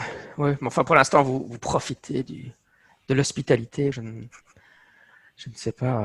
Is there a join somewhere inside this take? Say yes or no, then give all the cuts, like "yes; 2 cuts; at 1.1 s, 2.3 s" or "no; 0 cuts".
yes; 1 cut; at 3.9 s